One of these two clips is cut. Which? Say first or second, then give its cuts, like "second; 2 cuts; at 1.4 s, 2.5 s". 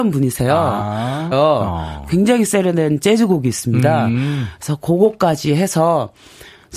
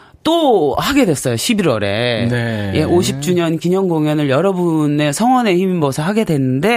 first; 1 cut; at 1.3 s